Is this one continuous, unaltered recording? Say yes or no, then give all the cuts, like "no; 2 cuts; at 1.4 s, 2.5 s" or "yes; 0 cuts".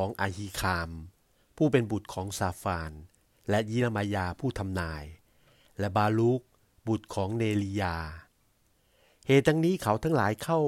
yes; 0 cuts